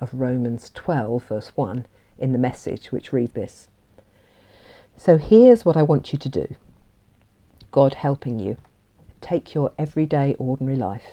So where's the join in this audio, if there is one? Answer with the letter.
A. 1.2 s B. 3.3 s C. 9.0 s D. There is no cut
B